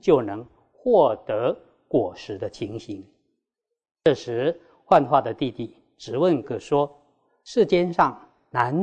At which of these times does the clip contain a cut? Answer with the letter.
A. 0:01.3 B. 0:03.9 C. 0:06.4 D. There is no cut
C